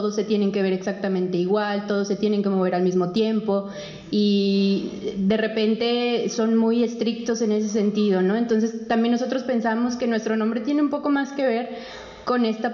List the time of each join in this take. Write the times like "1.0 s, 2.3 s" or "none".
none